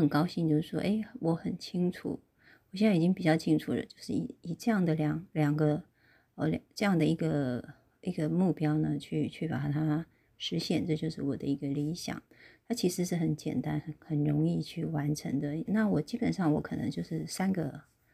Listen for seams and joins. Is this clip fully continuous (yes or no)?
no